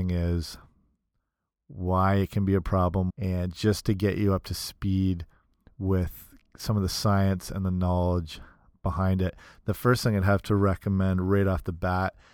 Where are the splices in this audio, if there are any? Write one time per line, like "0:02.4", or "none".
0:03.1